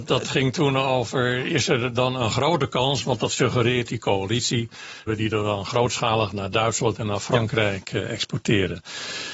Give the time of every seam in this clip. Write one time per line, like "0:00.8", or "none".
0:05.1